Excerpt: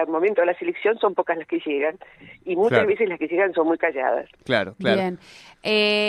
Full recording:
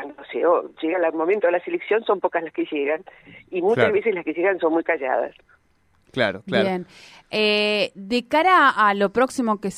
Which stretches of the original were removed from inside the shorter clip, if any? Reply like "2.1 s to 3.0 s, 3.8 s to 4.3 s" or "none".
5.4 s to 6.1 s